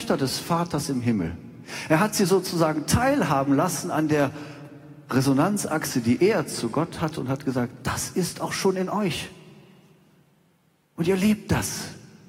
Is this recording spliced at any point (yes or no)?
no